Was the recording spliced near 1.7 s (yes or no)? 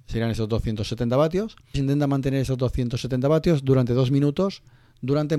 yes